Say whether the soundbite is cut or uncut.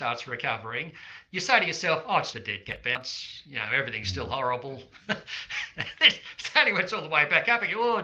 cut